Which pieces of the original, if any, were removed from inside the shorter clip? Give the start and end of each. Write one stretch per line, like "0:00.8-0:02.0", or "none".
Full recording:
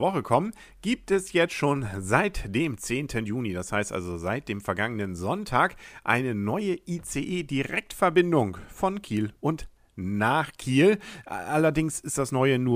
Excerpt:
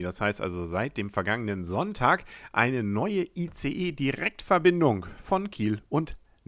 none